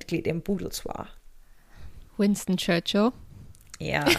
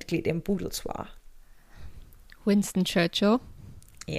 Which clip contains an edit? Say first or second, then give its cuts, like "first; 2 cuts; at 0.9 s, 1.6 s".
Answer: first; 1 cut; at 2.1 s